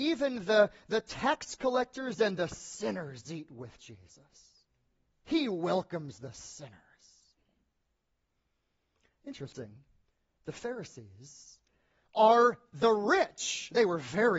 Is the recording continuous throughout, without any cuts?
yes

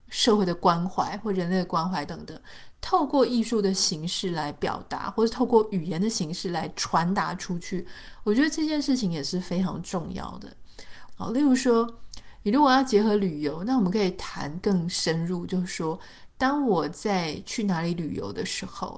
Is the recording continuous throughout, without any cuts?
no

